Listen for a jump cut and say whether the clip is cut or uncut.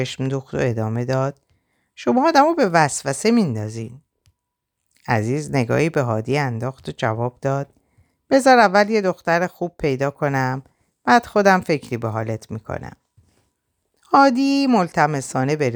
uncut